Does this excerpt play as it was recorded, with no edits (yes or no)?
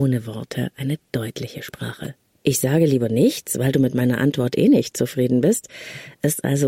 no